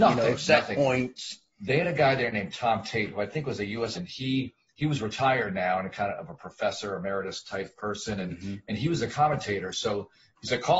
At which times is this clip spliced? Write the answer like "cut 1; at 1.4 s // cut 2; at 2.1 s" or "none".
cut 1; at 3.9 s